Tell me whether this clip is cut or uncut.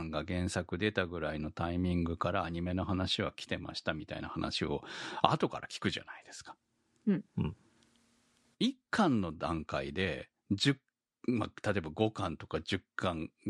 uncut